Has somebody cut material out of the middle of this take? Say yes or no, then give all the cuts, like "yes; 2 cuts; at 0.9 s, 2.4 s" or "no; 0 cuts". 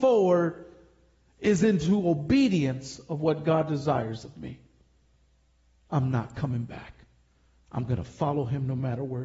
no; 0 cuts